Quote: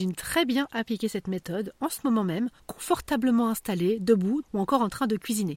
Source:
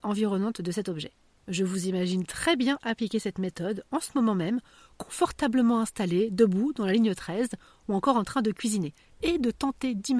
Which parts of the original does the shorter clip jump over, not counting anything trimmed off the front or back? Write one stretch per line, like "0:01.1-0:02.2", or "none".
0:04.7-0:04.9
0:06.7-0:07.8